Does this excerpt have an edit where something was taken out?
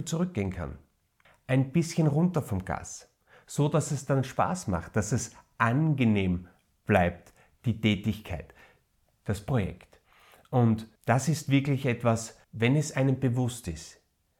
yes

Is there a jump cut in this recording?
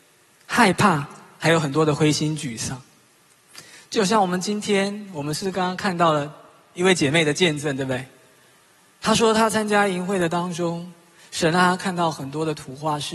no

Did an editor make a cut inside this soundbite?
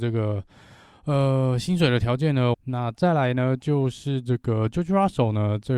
yes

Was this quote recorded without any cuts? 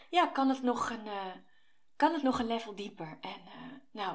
yes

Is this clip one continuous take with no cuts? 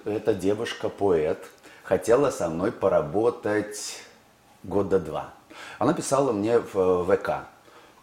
yes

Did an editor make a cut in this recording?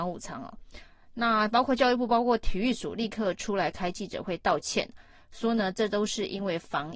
no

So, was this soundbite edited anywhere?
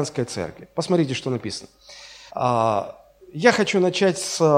yes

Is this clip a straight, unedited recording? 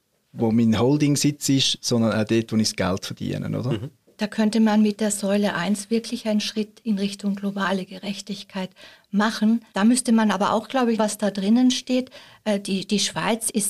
no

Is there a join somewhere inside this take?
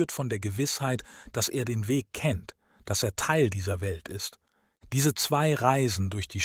no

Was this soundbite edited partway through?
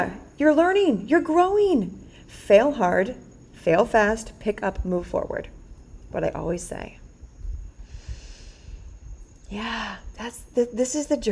no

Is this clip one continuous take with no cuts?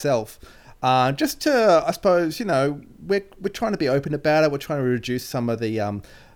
yes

